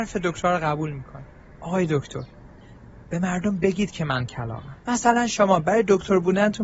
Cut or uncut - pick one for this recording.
cut